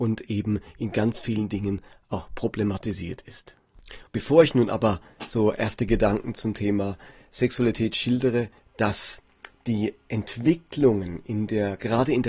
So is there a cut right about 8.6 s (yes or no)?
yes